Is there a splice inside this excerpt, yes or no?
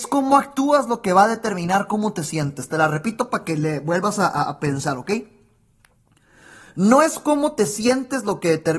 no